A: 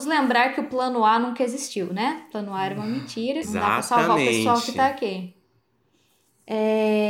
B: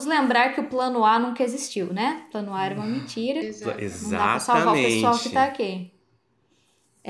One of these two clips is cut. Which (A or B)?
A